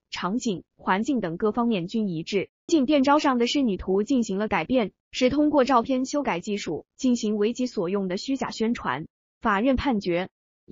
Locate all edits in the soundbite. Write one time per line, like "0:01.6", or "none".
0:02.7
0:05.0

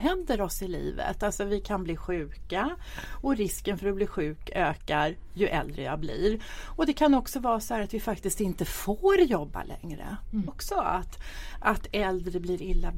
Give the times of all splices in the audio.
0:10.5

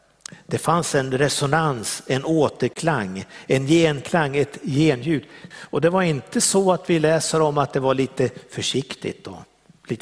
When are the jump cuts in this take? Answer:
0:05.5

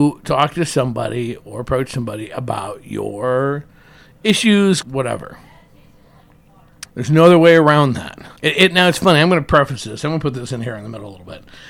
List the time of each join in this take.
0:04.8
0:06.8
0:08.4

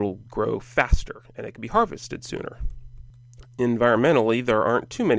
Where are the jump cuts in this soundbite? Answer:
0:03.4

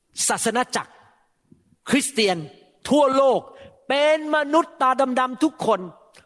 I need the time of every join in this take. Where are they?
none

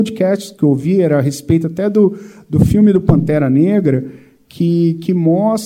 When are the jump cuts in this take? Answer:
none

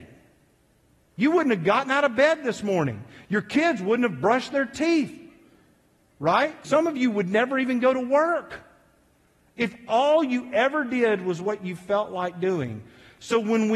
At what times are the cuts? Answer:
0:06.6

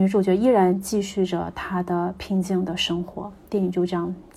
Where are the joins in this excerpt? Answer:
none

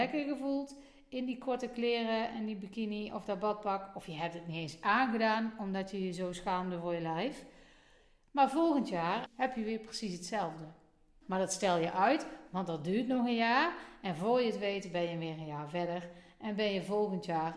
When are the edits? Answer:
0:09.3
0:11.2

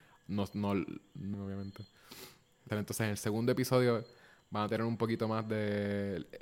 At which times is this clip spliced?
0:01.3
0:02.7

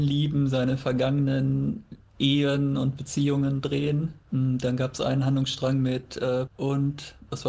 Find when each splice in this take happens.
0:04.2
0:06.5

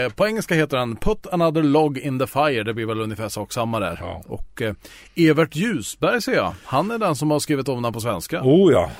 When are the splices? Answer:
none

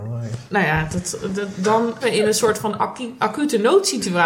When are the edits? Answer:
0:02.0

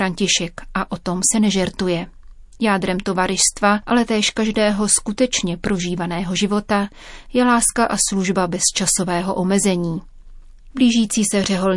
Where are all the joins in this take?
0:10.7

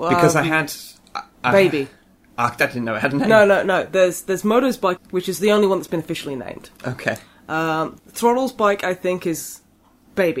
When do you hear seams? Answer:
0:05.0
0:08.0

